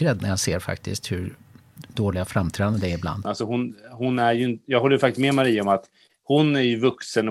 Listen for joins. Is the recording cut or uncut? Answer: cut